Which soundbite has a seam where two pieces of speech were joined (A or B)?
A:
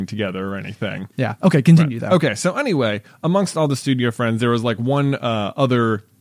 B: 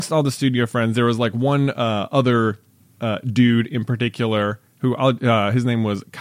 A